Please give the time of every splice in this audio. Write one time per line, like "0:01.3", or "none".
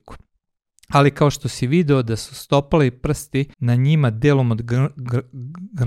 0:03.5